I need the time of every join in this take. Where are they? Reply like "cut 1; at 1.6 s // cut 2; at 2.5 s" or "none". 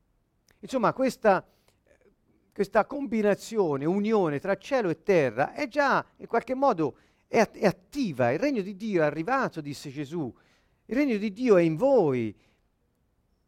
none